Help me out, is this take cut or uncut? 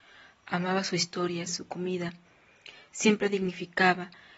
cut